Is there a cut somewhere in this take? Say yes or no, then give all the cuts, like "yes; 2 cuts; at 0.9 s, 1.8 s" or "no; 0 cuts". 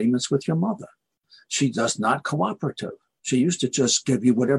no; 0 cuts